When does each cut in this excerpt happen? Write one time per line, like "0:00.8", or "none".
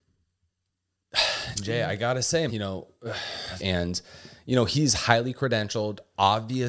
0:02.5
0:03.6